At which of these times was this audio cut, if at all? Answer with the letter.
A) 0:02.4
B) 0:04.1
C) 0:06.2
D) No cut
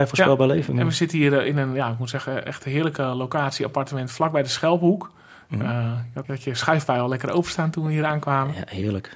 C